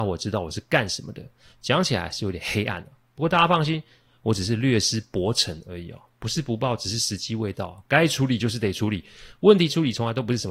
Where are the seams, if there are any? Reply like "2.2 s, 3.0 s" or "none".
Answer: none